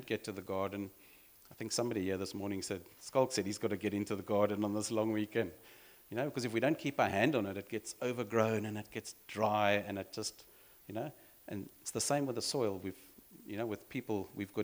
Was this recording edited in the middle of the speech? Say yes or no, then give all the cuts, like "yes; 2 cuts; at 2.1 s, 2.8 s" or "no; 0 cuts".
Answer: no; 0 cuts